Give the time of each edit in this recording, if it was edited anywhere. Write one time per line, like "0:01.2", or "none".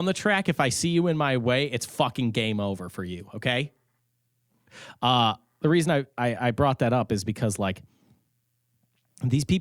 none

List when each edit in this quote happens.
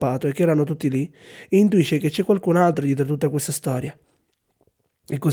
none

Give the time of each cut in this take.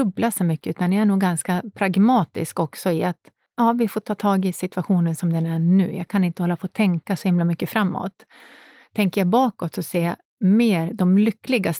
none

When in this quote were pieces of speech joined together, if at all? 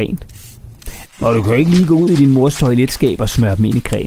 0:01.1

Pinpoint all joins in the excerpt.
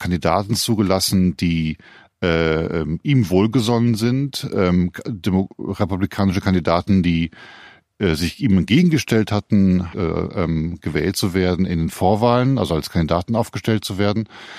0:09.9

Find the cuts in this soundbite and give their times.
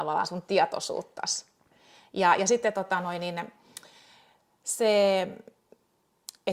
none

